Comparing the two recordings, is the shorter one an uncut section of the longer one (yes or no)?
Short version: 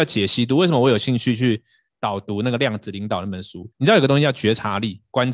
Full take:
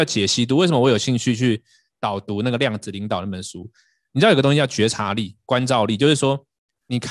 no